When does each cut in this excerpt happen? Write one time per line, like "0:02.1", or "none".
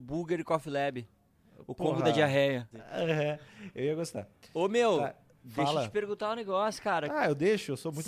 0:02.7

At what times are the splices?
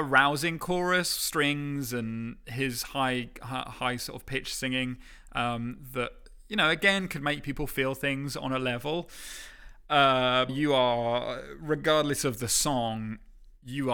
0:10.5

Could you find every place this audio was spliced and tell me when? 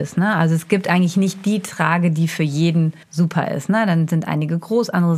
0:03.0

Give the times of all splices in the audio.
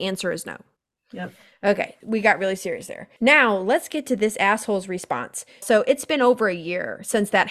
0:05.6

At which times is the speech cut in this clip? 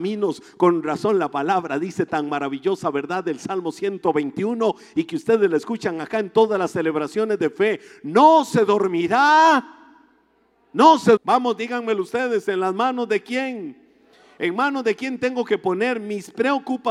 0:11.2

